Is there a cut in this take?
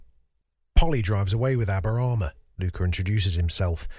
yes; 1 cut; at 2.5 s

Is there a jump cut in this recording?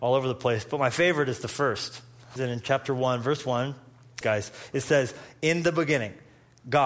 yes; 2 cuts; at 2.4 s, 4.2 s

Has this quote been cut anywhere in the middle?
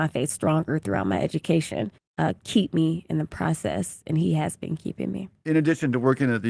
yes; 1 cut; at 2.0 s

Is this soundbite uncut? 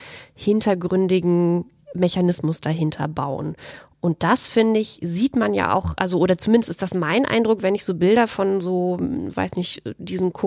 yes; 0 cuts

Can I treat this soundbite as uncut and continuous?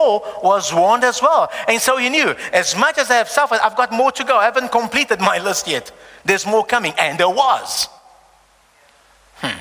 yes; 0 cuts

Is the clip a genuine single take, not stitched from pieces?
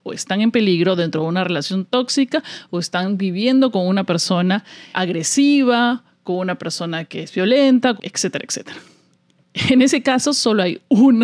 no; 2 cuts; at 4.9 s, 8.0 s

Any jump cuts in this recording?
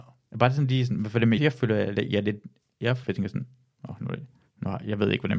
yes; 2 cuts; at 1.4 s, 3.0 s

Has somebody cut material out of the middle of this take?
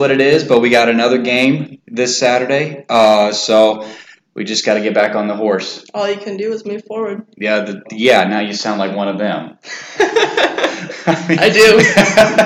yes; 1 cut; at 7.8 s

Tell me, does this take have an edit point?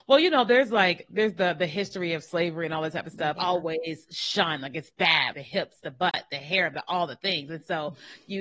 yes; 2 cuts; at 3.4 s, 5.3 s

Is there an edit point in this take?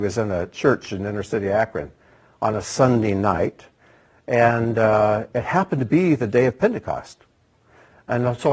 no; 0 cuts

